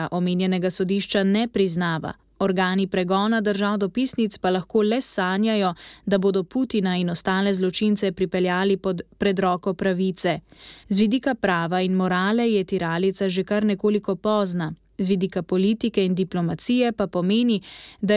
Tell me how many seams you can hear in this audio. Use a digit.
1